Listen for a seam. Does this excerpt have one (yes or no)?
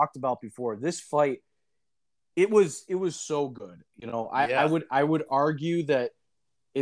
no